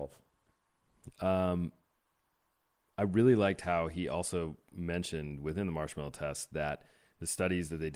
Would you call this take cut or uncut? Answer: cut